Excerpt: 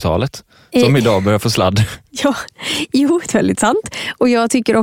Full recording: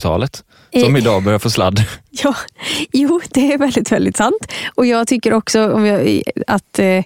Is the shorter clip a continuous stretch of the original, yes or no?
no